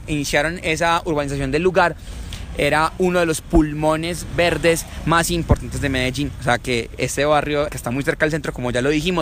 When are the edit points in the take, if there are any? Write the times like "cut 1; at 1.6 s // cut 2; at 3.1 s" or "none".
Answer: cut 1; at 7.7 s